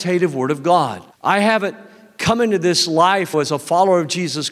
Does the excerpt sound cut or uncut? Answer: cut